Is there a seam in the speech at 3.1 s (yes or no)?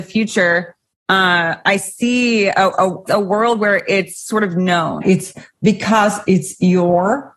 yes